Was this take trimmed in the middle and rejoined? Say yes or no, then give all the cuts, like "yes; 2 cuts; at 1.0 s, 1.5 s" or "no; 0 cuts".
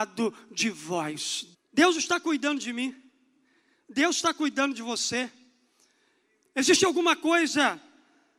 yes; 1 cut; at 1.5 s